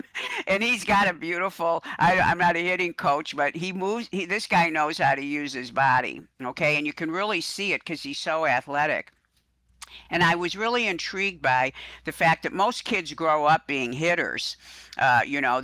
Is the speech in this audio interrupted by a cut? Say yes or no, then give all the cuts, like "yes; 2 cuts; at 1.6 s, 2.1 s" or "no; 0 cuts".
no; 0 cuts